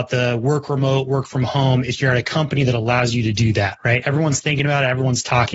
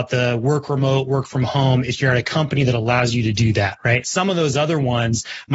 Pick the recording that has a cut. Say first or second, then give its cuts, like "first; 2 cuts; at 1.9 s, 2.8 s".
second; 1 cut; at 4.0 s